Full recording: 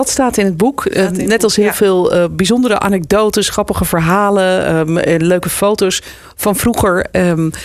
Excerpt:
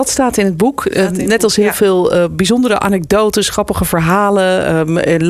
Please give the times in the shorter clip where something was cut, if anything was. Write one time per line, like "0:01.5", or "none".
none